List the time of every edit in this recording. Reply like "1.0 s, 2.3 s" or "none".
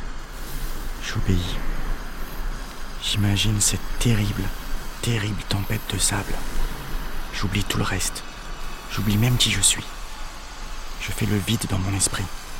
none